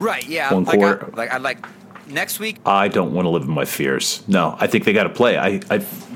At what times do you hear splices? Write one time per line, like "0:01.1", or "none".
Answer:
0:01.2
0:02.5